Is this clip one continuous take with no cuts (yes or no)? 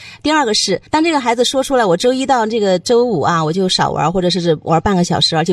yes